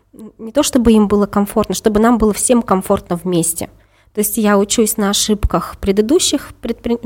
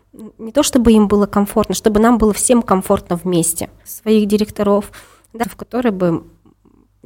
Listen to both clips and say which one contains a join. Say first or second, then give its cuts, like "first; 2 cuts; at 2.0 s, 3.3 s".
second; 2 cuts; at 3.8 s, 5.4 s